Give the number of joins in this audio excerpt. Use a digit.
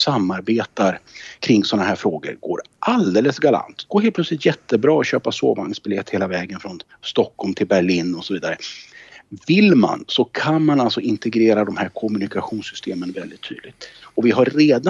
1